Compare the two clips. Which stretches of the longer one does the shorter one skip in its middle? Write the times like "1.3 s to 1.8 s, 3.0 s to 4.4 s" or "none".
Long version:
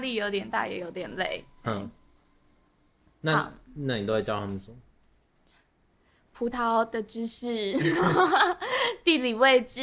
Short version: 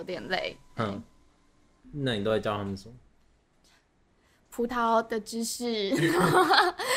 2.7 s to 3.6 s